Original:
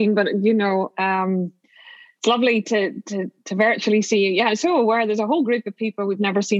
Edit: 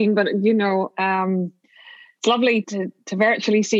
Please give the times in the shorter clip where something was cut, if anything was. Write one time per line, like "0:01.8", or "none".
0:02.6